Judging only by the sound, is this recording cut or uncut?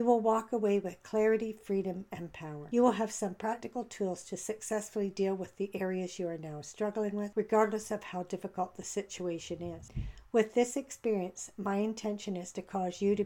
uncut